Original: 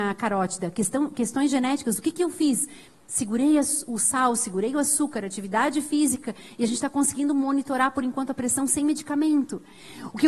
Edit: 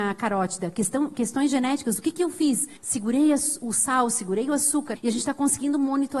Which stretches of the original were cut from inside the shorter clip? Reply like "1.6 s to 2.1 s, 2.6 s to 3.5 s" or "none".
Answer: 2.8 s to 3.0 s, 5.2 s to 6.5 s

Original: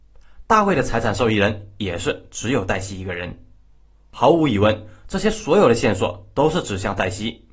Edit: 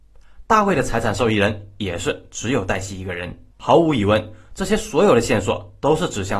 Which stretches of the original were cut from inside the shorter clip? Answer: 3.5 s to 4.0 s

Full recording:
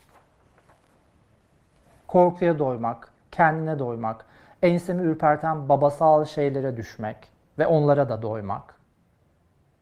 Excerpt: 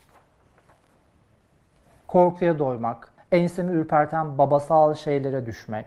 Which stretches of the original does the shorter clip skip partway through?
3.2 s to 4.5 s

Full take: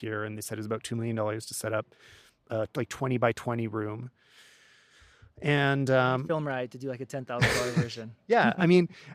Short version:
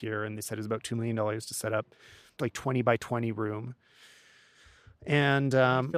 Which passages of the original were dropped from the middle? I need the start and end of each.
2.4 s to 2.7 s

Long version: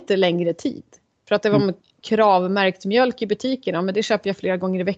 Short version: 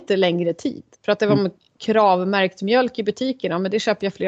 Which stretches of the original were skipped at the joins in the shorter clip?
0.9 s to 1.2 s

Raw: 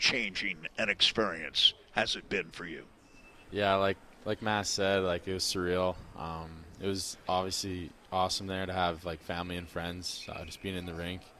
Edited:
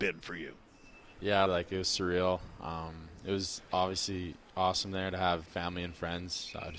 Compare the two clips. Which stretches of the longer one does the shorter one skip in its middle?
3.8 s to 5.0 s, 9.0 s to 9.2 s

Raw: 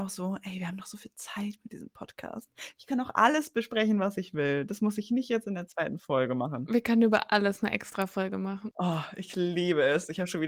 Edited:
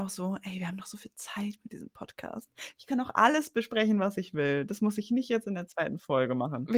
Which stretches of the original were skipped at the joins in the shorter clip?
none

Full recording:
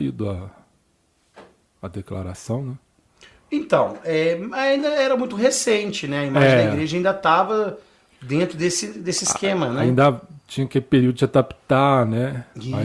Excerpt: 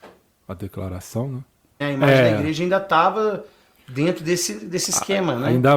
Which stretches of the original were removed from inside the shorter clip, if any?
3.1 s to 6.1 s

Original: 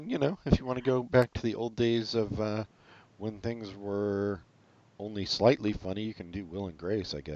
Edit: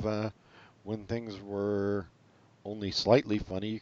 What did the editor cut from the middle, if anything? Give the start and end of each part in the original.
none

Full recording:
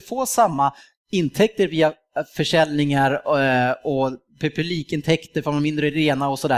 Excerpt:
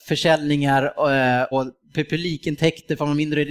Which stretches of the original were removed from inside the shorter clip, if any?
3.8 s to 4.0 s

